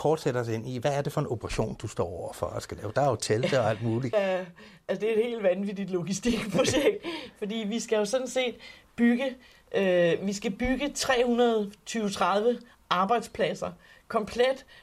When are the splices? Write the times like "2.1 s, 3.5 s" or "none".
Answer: 4.1 s